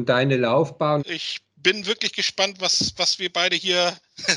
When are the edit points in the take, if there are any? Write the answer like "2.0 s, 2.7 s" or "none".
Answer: 1.0 s